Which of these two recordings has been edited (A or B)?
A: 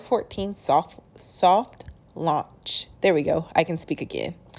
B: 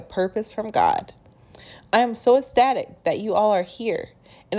A